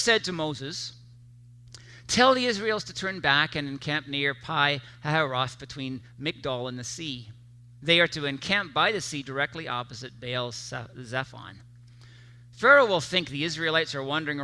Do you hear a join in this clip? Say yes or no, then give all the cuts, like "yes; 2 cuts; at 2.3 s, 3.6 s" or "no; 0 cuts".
no; 0 cuts